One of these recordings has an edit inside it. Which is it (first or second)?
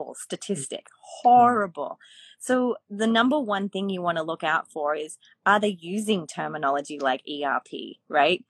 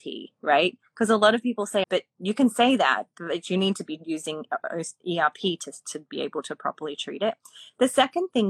second